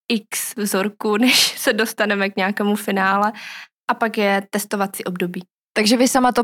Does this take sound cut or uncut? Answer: uncut